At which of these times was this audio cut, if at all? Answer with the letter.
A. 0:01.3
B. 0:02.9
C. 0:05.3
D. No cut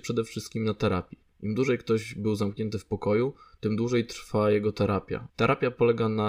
C